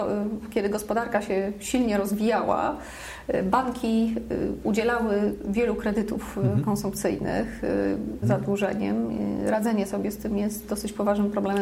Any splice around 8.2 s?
yes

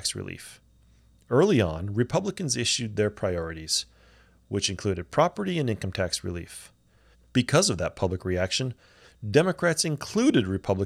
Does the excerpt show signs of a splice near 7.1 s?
yes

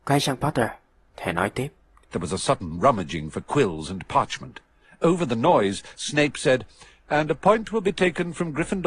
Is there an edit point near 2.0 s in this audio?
yes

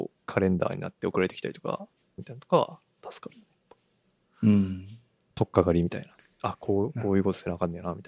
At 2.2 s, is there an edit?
yes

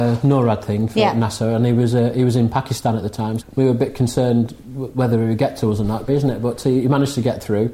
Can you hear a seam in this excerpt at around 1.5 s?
no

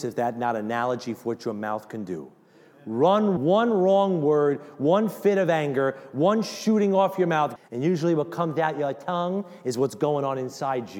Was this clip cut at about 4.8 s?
no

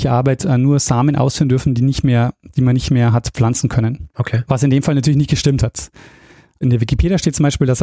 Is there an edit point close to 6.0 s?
no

